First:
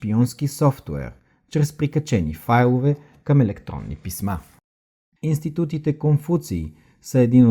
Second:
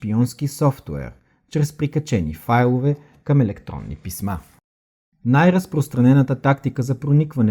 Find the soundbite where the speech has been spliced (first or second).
first